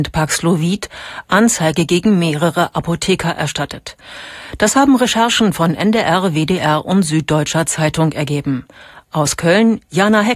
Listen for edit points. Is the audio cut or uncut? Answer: uncut